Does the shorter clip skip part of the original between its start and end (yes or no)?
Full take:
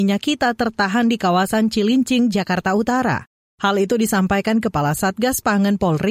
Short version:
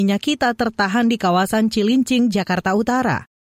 no